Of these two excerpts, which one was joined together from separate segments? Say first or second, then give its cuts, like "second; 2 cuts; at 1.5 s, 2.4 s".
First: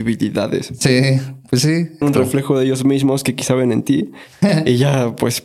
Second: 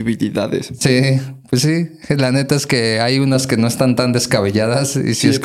first; 1 cut; at 2.0 s